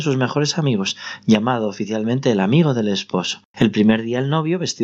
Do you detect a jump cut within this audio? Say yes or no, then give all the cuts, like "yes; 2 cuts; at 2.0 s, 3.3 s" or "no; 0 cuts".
yes; 1 cut; at 3.5 s